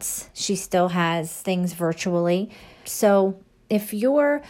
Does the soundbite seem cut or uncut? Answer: cut